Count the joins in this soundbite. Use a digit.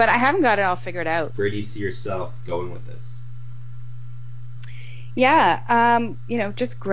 1